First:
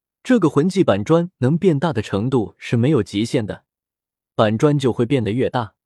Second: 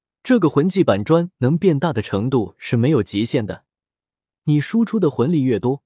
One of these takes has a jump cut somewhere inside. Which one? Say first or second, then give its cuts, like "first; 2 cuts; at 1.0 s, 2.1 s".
first; 1 cut; at 4.2 s